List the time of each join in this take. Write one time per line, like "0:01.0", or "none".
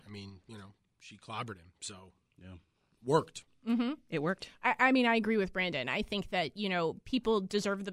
none